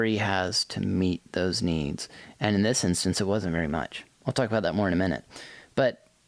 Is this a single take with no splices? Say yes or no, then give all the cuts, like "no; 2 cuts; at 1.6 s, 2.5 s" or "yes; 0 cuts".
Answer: yes; 0 cuts